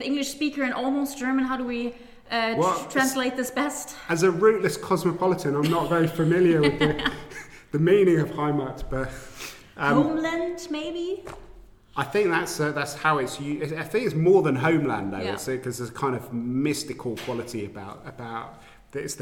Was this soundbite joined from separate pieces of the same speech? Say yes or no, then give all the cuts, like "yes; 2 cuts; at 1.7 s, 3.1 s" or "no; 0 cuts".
no; 0 cuts